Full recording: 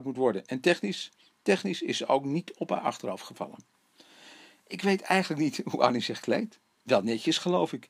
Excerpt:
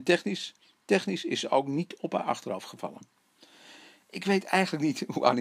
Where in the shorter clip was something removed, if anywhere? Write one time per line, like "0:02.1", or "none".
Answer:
none